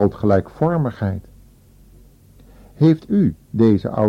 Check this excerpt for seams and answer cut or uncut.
uncut